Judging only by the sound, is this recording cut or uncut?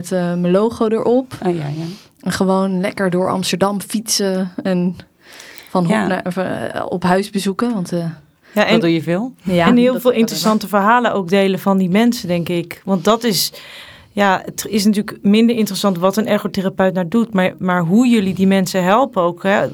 uncut